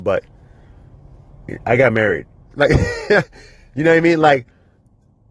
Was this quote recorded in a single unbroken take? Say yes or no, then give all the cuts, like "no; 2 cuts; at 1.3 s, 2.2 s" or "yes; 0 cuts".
no; 1 cut; at 2.5 s